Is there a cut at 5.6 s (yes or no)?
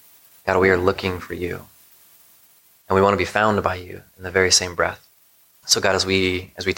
yes